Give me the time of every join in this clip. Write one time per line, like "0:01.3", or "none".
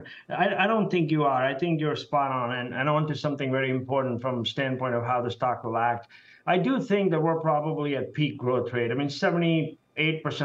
none